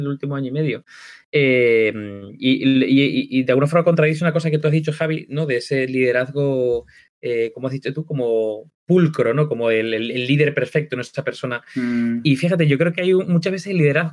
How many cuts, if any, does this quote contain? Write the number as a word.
zero